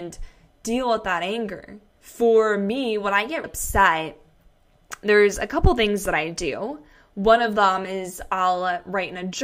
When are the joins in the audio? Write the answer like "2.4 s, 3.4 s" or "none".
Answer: 2.0 s, 3.4 s